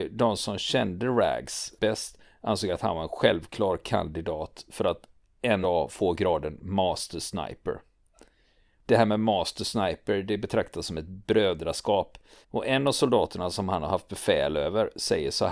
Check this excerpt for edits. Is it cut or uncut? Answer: cut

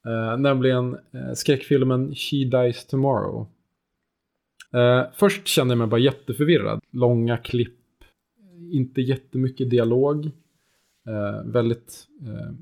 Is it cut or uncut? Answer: cut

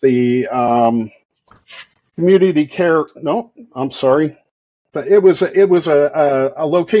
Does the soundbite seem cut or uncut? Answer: cut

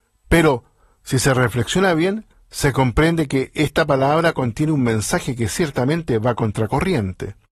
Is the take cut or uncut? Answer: uncut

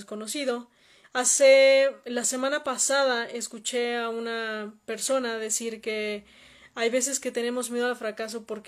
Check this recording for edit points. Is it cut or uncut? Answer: cut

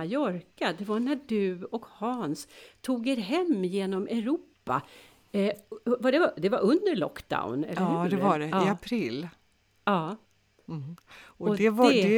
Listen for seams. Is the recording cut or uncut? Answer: uncut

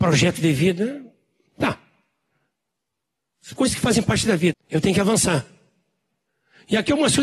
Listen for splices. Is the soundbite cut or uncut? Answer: cut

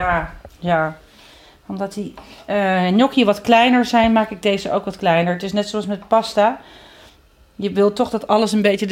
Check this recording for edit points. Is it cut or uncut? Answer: uncut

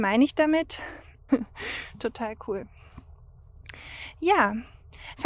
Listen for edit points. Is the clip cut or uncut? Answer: cut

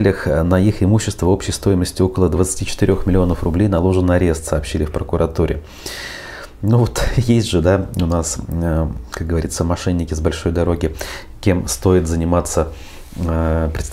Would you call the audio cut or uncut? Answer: uncut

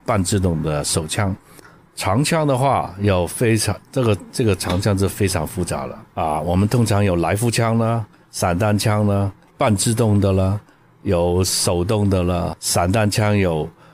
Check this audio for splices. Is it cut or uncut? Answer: uncut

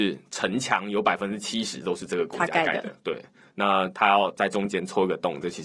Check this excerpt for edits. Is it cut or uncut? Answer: uncut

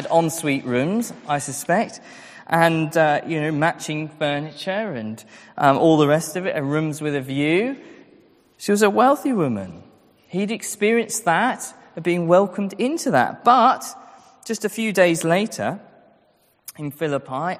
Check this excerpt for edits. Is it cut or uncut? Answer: uncut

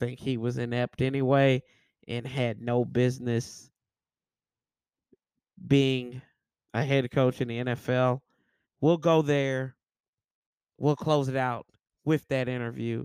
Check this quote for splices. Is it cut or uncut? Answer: cut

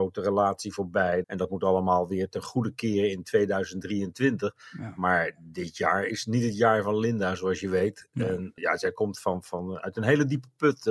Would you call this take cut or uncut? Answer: cut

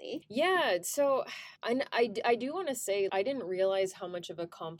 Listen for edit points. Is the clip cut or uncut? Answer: cut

